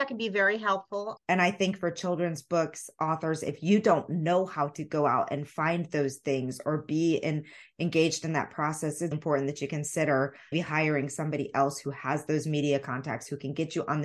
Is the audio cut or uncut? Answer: cut